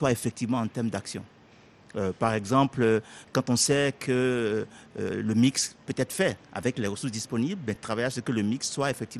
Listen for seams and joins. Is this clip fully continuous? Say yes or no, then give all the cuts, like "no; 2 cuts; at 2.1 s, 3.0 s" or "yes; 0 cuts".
yes; 0 cuts